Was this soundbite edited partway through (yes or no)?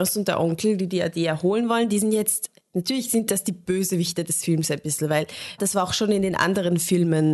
yes